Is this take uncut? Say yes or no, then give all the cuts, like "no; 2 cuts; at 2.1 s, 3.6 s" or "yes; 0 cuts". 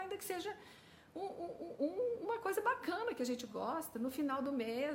yes; 0 cuts